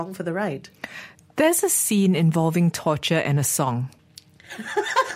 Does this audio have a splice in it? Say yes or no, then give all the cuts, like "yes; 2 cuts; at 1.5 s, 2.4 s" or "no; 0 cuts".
yes; 1 cut; at 4.0 s